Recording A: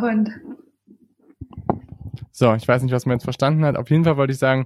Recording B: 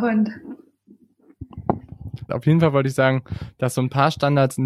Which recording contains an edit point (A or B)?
B